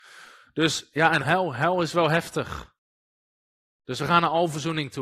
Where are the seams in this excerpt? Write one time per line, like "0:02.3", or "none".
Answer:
0:01.2

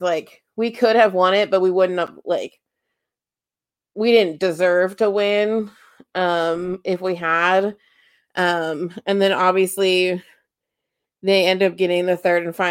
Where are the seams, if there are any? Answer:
none

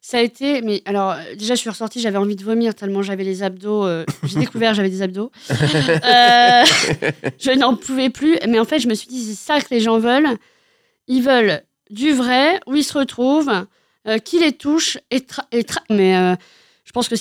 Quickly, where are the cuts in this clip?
0:15.9

